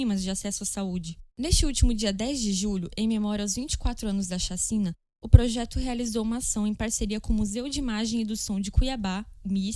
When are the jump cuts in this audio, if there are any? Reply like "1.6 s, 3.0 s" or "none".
1.3 s